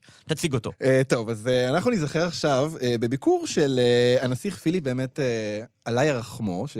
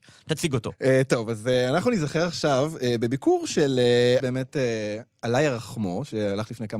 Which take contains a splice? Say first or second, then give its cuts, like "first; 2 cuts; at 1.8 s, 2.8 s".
second; 1 cut; at 4.2 s